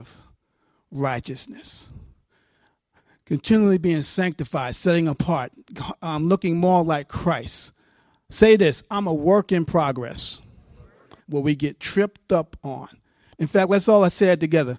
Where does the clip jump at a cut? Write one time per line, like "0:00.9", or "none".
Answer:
0:11.2
0:13.3